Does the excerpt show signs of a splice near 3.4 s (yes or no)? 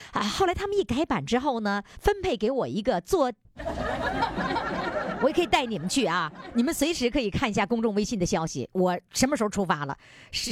yes